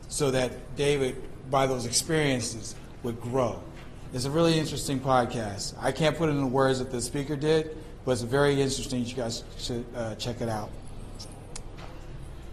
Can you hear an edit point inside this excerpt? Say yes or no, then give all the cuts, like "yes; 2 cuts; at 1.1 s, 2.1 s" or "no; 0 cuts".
no; 0 cuts